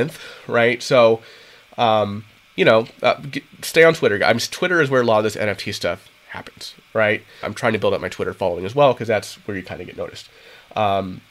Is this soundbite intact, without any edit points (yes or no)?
no